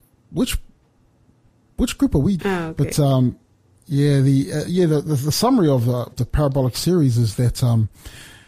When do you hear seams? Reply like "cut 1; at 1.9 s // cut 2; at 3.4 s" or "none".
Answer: cut 1; at 2.4 s // cut 2; at 6.1 s